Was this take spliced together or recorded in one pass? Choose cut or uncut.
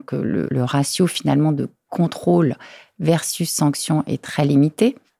uncut